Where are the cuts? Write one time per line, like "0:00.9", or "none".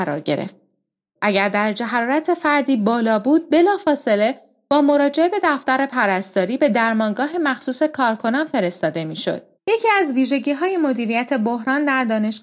0:01.2
0:09.5